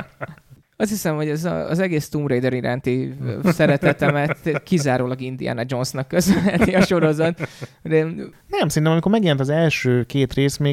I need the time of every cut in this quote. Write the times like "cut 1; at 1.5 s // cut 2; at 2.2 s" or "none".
none